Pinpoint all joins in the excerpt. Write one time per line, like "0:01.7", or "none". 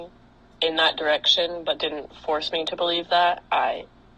none